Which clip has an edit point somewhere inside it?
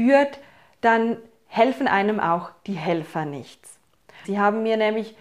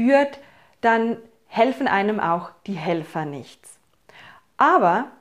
first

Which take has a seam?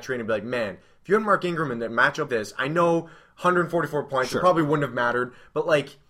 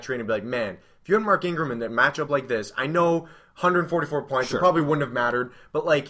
first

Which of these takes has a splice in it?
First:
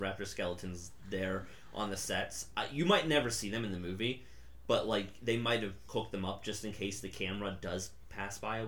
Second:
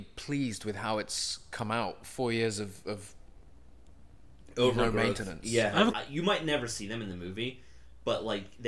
second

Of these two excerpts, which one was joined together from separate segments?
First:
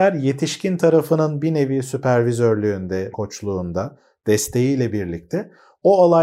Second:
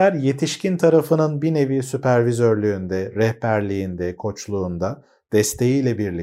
first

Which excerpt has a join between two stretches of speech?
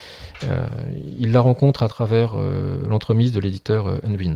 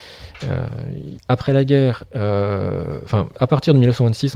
second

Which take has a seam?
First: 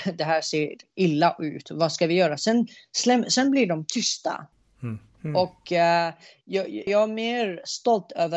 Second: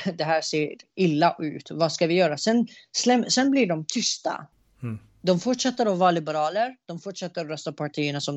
first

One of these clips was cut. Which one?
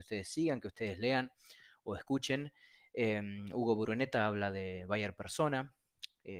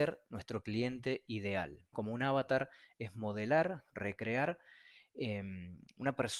second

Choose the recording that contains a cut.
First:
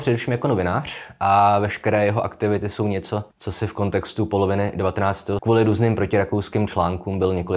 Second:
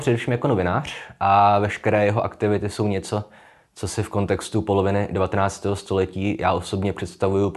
first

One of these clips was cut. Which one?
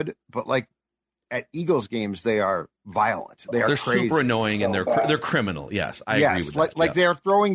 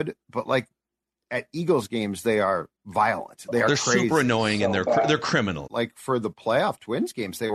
second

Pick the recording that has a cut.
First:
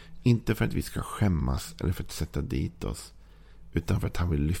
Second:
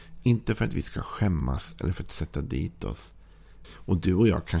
second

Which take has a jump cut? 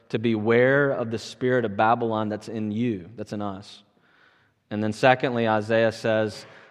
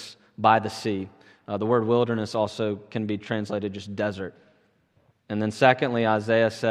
second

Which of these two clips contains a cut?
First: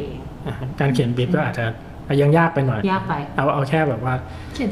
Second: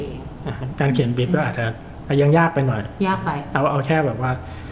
first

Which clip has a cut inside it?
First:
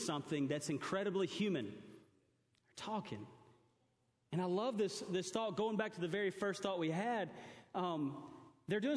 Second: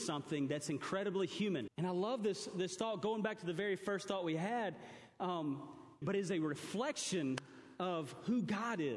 second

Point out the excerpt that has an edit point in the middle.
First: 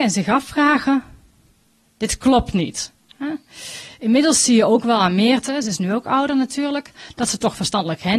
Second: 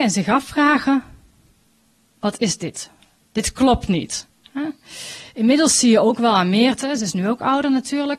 first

